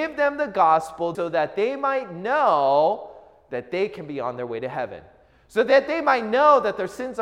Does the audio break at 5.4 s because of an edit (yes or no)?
no